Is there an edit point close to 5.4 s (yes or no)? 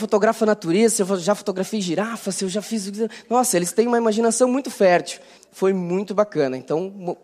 yes